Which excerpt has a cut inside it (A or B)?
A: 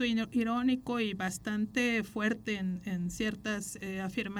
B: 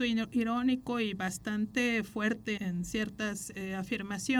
B